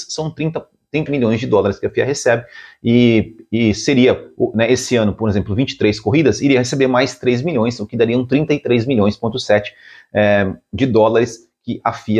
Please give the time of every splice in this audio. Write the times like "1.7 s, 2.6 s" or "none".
1.1 s